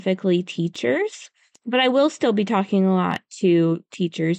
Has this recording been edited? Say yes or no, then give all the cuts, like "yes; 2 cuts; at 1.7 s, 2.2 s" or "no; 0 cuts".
no; 0 cuts